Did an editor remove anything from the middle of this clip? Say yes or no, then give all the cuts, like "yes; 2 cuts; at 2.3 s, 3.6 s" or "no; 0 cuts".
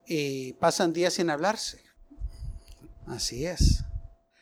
yes; 1 cut; at 2.9 s